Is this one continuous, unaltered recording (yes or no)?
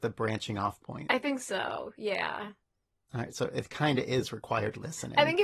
yes